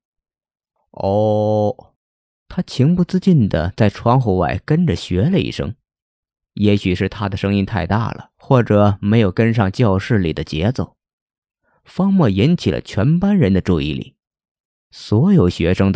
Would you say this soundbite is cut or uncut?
cut